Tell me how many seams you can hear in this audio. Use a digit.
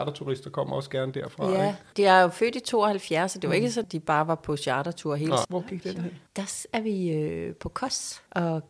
2